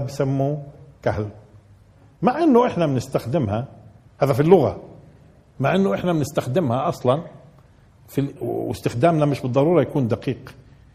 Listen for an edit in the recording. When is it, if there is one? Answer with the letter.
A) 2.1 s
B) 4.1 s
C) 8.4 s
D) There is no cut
C